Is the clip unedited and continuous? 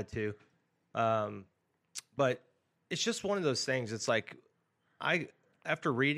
yes; 0 cuts

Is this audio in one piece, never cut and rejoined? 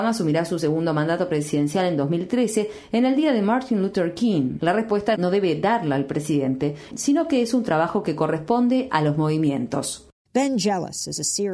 no; 2 cuts; at 4.6 s, 6.9 s

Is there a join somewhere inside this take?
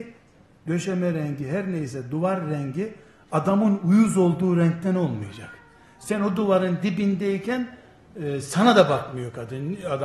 no; 0 cuts

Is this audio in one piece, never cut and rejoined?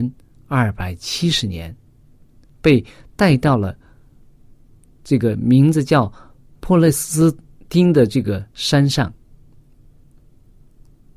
yes; 0 cuts

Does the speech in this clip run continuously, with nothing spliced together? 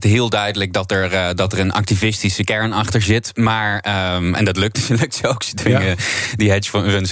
yes; 0 cuts

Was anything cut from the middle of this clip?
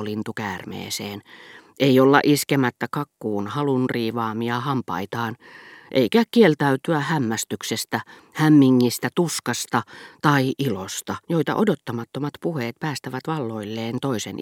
yes; 1 cut; at 11.2 s

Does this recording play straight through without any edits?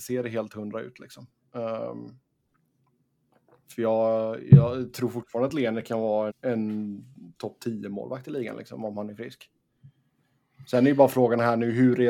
no; 1 cut; at 6.3 s

